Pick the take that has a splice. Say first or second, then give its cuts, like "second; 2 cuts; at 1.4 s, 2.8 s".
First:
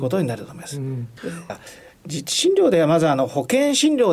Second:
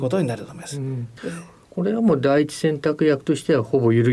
first; 1 cut; at 1.5 s